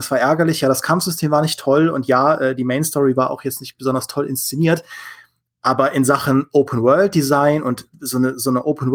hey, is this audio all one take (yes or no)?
yes